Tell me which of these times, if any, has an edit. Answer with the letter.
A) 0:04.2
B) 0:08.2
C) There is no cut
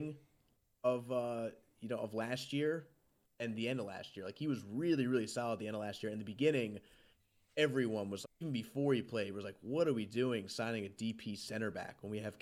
B